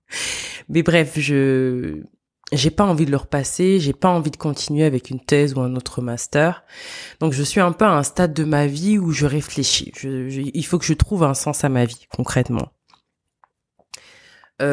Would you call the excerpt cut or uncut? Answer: uncut